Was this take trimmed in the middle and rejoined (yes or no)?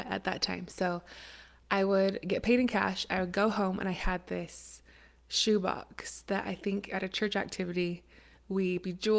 no